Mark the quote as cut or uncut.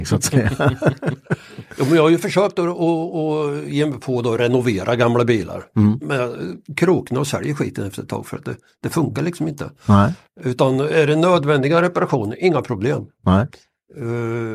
uncut